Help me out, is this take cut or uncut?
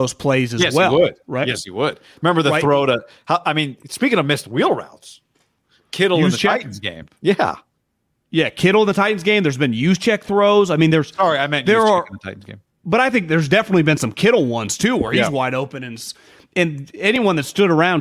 uncut